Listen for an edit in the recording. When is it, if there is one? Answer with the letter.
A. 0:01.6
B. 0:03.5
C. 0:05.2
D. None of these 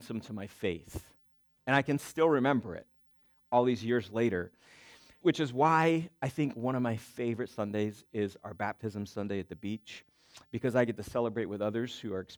C